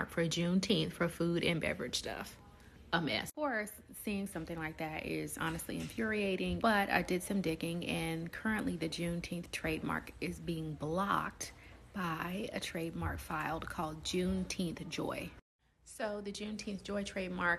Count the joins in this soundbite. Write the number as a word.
one